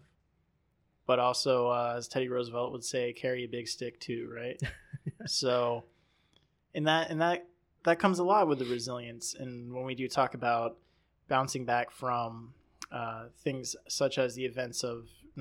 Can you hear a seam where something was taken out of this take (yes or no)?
no